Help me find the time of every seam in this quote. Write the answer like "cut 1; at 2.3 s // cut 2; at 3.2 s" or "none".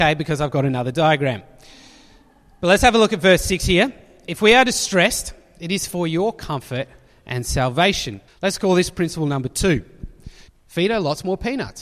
cut 1; at 8.3 s // cut 2; at 10.5 s